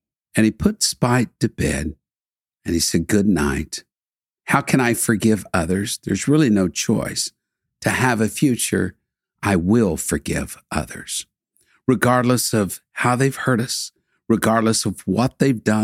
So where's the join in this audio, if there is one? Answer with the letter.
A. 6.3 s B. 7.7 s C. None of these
C